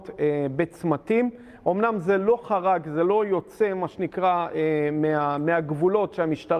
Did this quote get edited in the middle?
no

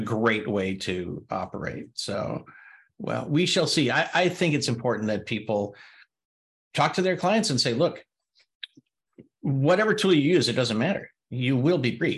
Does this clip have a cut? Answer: yes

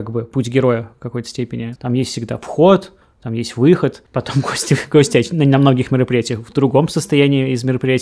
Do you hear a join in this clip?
yes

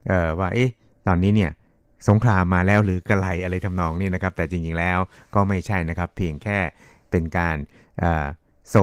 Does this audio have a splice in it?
no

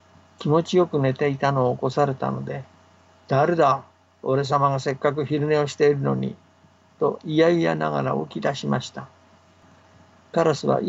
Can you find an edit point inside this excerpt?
no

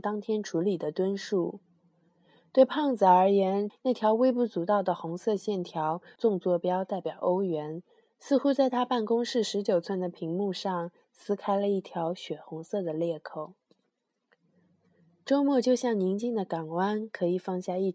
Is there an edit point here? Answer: yes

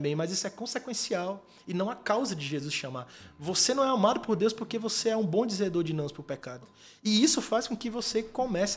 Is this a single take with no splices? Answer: no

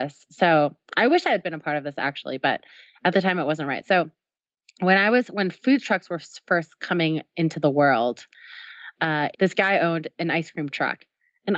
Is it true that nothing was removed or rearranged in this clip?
no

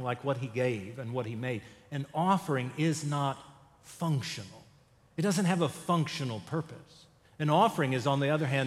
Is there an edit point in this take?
no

